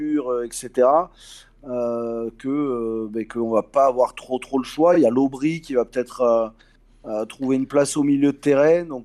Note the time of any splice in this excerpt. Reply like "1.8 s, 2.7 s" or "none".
none